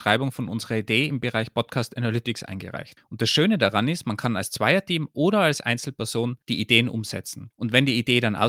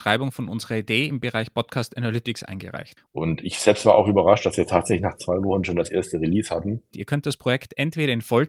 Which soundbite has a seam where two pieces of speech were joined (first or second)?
second